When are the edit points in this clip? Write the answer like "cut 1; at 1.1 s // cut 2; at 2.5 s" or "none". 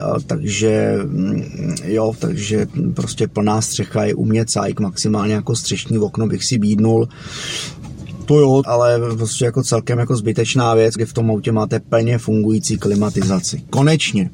cut 1; at 8.6 s // cut 2; at 10.9 s